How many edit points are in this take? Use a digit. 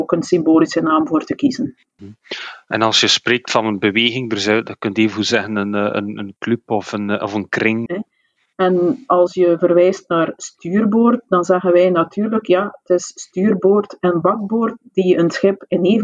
1